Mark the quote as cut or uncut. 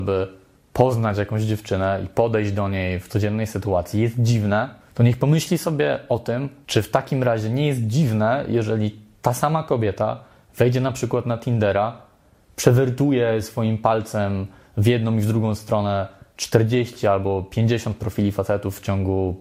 uncut